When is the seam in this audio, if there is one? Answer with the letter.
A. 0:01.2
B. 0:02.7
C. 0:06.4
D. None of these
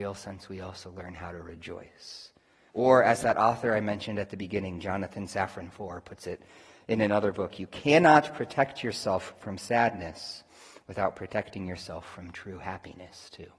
B